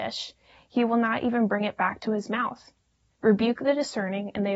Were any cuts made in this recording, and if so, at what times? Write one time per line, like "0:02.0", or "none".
0:03.1